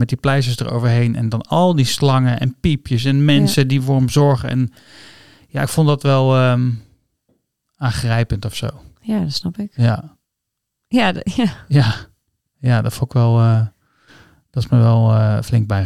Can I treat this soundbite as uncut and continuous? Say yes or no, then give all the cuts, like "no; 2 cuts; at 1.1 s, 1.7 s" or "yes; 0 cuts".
yes; 0 cuts